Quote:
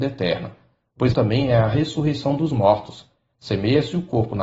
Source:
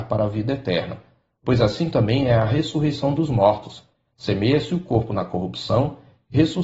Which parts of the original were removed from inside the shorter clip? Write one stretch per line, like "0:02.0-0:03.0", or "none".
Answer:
0:01.6-0:01.9